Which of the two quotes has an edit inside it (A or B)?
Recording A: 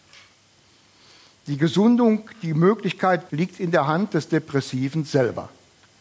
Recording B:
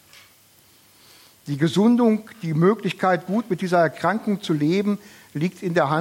A